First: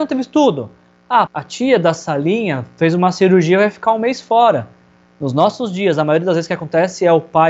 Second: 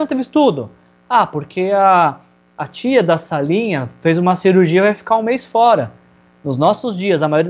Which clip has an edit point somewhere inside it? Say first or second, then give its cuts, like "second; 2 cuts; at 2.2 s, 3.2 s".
first; 1 cut; at 1.3 s